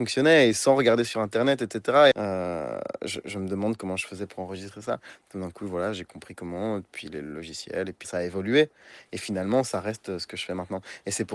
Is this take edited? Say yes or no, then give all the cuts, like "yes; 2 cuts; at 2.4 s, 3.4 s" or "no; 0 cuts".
yes; 2 cuts; at 2.1 s, 8.0 s